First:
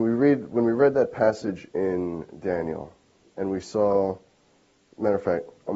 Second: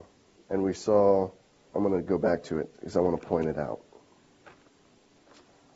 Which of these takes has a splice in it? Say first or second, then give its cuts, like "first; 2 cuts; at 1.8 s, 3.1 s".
second; 1 cut; at 1.7 s